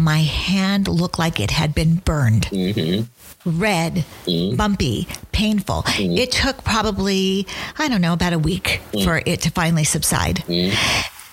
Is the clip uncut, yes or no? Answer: yes